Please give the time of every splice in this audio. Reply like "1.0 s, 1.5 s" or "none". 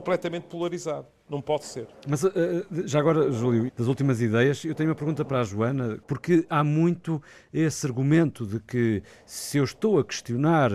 3.7 s, 6.0 s

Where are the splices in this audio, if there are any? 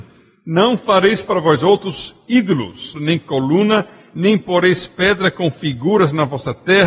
2.9 s

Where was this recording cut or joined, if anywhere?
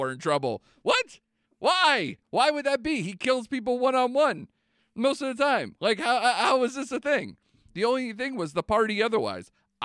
none

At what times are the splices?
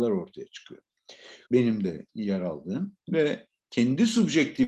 1.4 s

